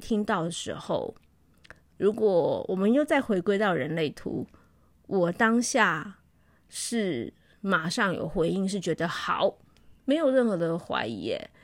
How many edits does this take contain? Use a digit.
1